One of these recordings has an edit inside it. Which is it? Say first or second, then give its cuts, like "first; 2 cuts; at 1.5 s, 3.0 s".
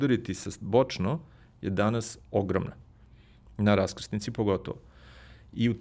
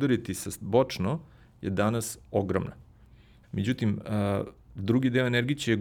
second; 1 cut; at 3.4 s